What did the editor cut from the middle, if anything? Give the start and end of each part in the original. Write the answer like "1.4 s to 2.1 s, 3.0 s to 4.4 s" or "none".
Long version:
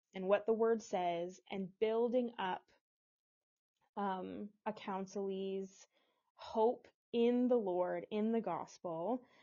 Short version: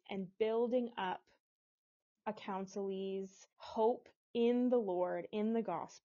3.6 s to 4.6 s, 5.9 s to 6.3 s